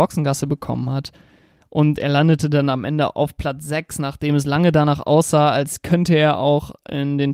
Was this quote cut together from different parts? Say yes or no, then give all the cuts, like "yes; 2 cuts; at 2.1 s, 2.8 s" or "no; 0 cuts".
no; 0 cuts